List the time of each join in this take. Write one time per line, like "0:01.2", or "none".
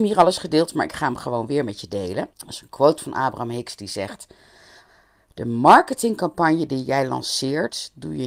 0:02.3